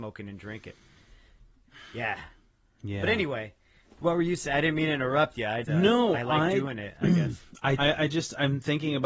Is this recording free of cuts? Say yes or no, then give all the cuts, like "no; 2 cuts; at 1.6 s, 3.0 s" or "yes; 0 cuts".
no; 2 cuts; at 5.6 s, 7.8 s